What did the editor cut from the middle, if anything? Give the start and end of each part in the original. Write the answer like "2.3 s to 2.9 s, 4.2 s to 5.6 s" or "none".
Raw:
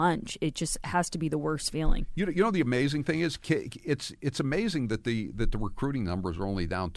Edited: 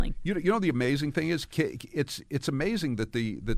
none